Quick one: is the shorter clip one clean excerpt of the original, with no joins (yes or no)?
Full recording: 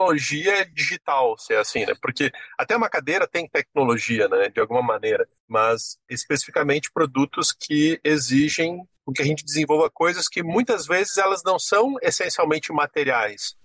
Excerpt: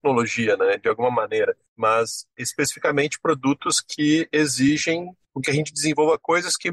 yes